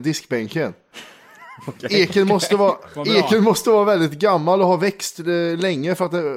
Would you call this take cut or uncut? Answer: uncut